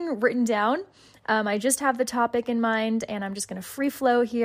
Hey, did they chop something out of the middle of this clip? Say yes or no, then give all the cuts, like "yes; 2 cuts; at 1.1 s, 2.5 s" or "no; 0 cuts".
no; 0 cuts